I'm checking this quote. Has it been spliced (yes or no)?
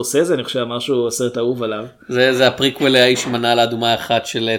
no